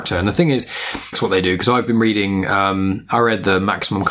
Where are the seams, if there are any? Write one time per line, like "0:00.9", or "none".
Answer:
0:01.1